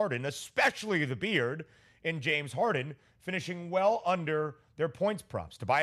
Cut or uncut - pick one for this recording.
uncut